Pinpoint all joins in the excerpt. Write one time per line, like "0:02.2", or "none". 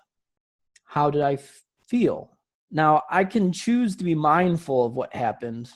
0:02.5

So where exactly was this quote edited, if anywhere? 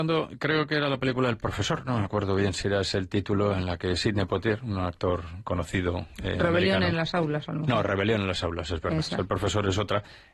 none

